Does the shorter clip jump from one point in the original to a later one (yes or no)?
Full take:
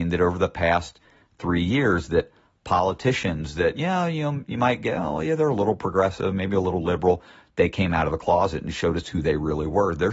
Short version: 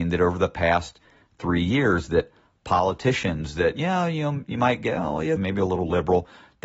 yes